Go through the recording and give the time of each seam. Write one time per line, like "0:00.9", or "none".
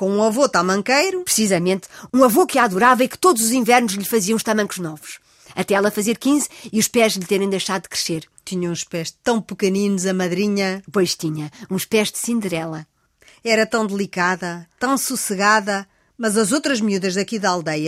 none